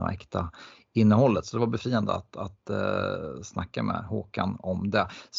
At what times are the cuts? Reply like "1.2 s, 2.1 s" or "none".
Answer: none